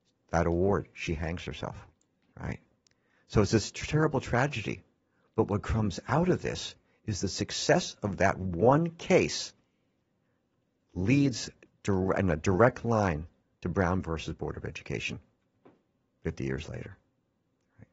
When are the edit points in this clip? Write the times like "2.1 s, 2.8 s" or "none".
2.3 s